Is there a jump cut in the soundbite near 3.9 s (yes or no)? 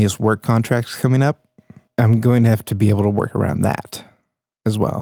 no